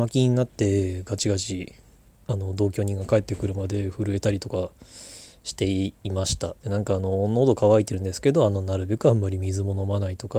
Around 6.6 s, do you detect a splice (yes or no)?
yes